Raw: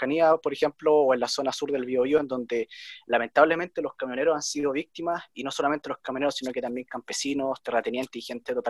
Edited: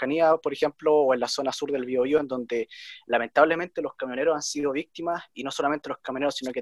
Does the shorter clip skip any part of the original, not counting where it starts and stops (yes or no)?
no